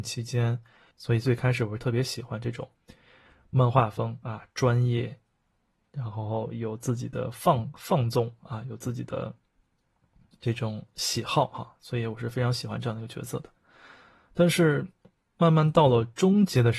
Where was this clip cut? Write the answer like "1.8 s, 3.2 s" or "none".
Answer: 0.9 s